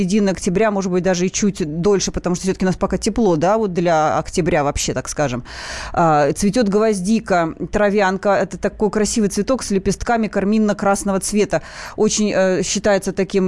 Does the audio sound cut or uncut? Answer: uncut